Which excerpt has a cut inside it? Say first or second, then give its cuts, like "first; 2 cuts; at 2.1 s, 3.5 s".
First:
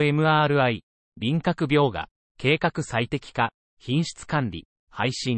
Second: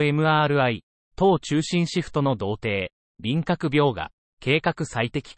first; 1 cut; at 1.0 s